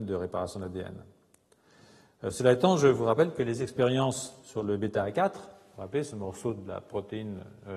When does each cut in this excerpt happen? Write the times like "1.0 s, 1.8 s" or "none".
none